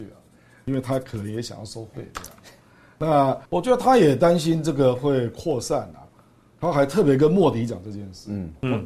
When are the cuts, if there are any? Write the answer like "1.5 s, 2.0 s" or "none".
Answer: 3.5 s, 6.1 s